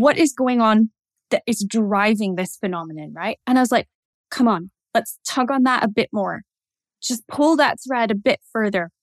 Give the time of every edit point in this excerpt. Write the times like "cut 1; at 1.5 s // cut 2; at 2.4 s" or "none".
cut 1; at 3.4 s